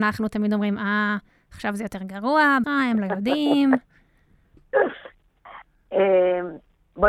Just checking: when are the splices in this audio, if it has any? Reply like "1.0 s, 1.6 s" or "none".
2.6 s